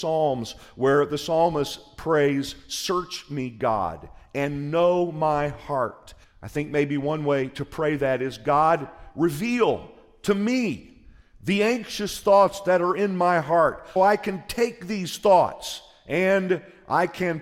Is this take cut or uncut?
cut